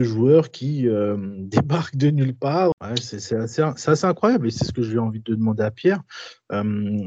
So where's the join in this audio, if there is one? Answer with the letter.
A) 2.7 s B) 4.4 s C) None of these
A